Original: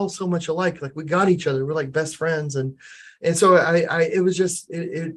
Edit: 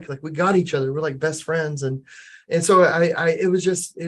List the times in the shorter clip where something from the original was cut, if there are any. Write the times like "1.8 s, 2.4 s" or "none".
none